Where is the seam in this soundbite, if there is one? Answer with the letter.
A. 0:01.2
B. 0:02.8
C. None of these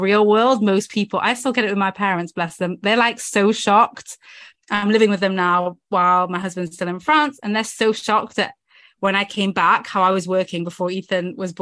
C